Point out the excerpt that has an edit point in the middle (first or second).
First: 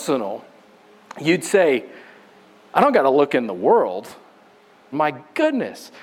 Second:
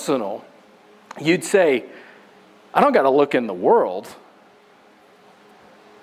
first